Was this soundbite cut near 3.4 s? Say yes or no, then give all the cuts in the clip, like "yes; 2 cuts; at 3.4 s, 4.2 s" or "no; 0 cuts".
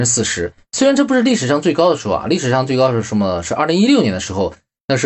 no; 0 cuts